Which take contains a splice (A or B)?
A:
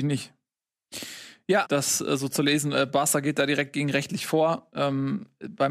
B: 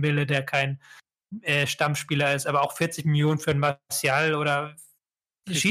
A